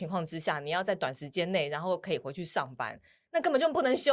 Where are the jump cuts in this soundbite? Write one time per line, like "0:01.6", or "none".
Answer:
none

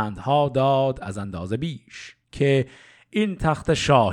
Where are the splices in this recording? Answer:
0:02.2

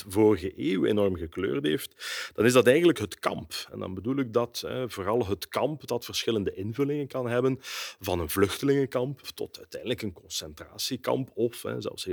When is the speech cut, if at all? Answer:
0:09.2

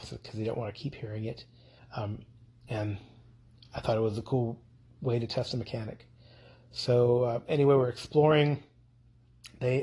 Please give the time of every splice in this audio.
0:01.8

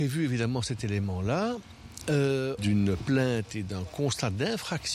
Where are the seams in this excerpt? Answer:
0:02.6

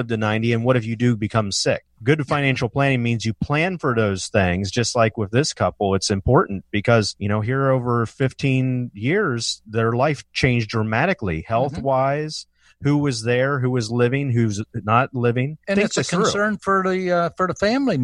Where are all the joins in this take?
none

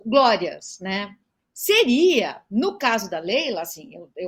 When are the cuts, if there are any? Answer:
none

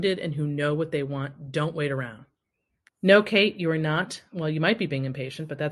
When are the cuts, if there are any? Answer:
0:02.9

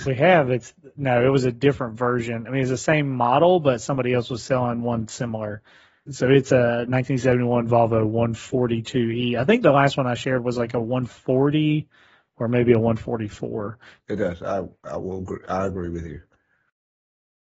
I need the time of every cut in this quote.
0:06.1
0:14.0

